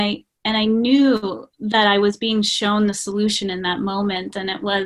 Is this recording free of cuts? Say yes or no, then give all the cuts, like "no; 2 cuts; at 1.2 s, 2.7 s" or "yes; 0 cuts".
no; 1 cut; at 1.5 s